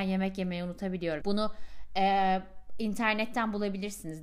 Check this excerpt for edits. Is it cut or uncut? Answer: cut